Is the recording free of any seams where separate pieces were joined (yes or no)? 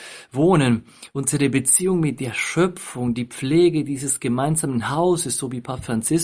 yes